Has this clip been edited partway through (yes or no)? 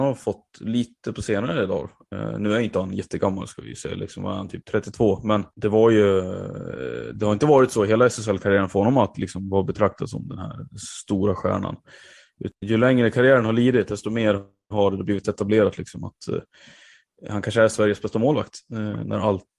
yes